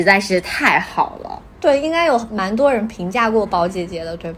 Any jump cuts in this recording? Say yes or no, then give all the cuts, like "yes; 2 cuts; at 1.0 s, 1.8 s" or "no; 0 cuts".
no; 0 cuts